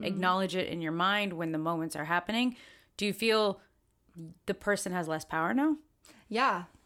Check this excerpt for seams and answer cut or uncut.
uncut